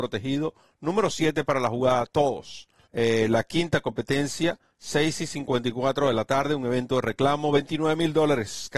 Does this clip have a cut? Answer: yes; 1 cut; at 2.9 s

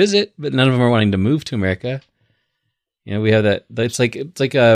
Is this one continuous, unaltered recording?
yes; 0 cuts

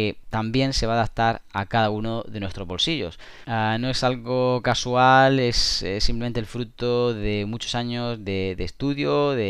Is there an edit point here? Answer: yes; 1 cut; at 3.4 s

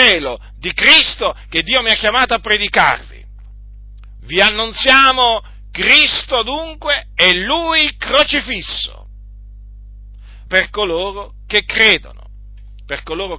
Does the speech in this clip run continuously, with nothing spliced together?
no; 2 cuts; at 4.2 s, 10.5 s

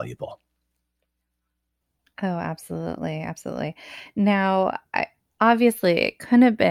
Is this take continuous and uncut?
yes; 0 cuts

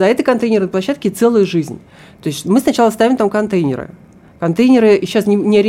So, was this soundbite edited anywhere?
no; 0 cuts

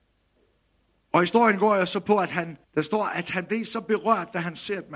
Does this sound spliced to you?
yes; 1 cut; at 2.6 s

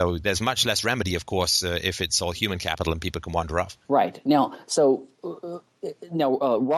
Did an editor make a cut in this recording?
yes; 1 cut; at 3.8 s

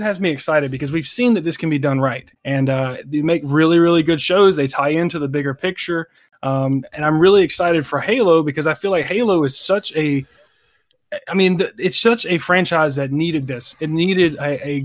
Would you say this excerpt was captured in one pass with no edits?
no; 1 cut; at 2.3 s

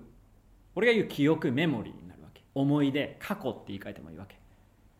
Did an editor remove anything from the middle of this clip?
yes; 1 cut; at 2.5 s

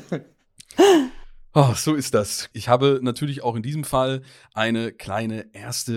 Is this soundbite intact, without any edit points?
no; 1 cut; at 2.5 s

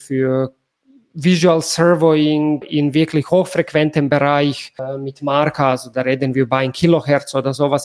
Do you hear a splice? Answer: no; 0 cuts

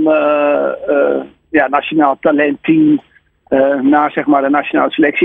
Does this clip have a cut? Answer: no; 0 cuts

